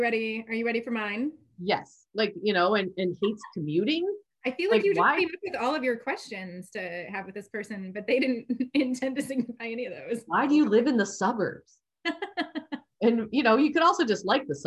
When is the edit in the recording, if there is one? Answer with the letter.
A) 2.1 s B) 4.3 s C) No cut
A